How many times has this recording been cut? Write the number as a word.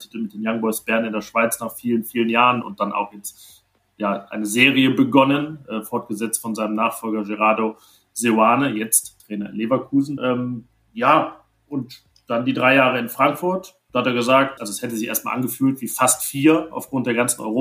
two